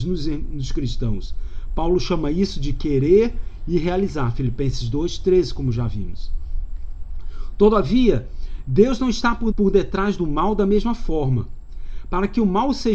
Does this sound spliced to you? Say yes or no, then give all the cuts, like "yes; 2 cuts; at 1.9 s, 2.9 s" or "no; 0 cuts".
yes; 1 cut; at 9.5 s